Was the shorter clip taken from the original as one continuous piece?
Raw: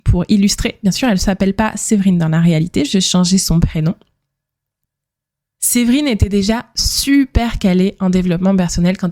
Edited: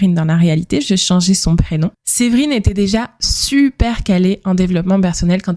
no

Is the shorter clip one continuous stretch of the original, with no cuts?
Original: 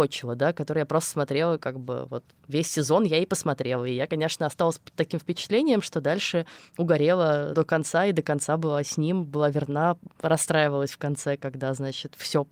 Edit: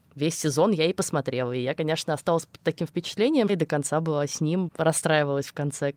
no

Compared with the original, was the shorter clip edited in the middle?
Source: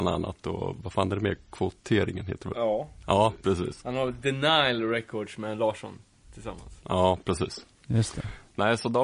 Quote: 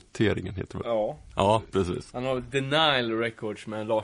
no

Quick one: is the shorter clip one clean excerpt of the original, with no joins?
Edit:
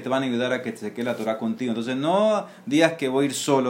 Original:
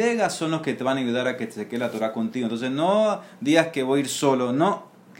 yes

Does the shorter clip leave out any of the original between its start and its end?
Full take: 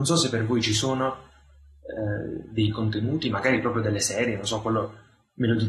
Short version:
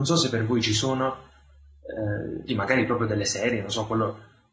yes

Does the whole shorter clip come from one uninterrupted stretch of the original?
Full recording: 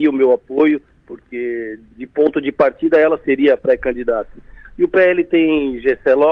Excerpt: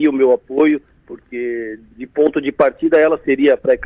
yes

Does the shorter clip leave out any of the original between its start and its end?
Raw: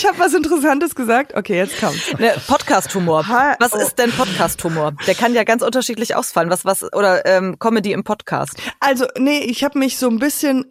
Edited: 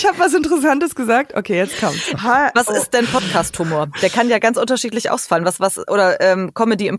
yes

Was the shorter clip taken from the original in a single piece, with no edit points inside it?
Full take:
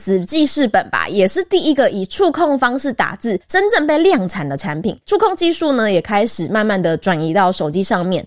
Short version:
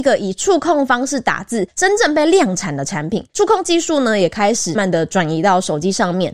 no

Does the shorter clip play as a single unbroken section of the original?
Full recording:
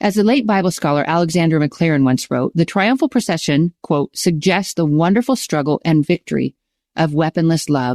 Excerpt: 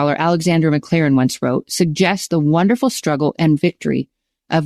no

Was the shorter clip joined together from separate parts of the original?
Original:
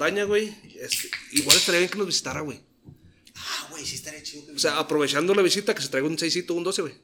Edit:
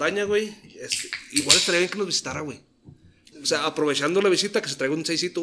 yes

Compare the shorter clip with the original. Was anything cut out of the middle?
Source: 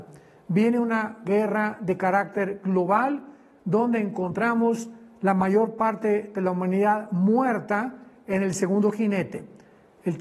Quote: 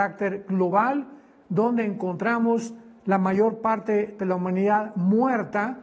no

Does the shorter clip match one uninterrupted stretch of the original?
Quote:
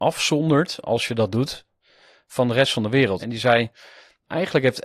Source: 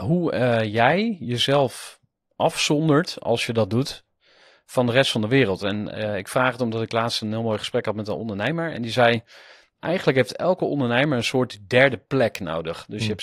no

